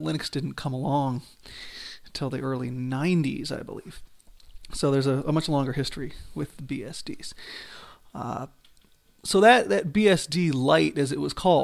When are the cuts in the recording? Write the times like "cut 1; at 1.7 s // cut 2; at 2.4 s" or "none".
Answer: none